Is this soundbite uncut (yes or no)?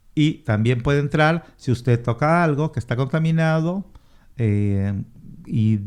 yes